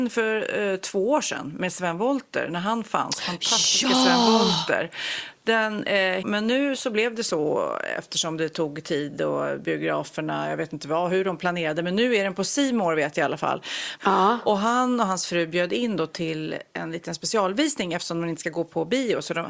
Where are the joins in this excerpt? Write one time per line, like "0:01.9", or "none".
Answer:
0:06.2
0:14.0